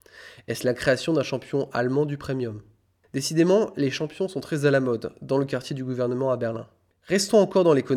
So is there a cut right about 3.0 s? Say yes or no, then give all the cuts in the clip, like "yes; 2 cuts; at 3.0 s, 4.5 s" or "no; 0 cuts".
no; 1 cut; at 6.9 s